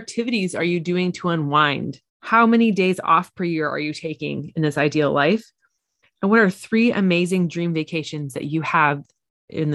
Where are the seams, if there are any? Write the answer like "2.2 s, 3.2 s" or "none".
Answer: 2.1 s

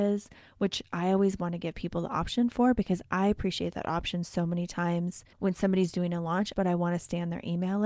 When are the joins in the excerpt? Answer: 5.3 s, 6.5 s

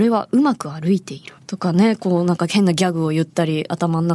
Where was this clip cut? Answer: 1.4 s

